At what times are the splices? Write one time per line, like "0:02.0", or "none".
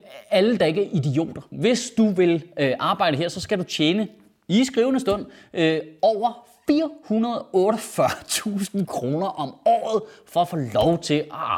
0:01.5